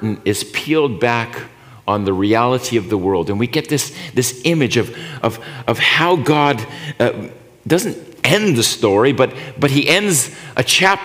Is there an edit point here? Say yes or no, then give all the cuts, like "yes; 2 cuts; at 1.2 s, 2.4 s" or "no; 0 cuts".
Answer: no; 0 cuts